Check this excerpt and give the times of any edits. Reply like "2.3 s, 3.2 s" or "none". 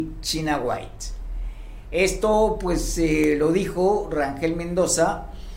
none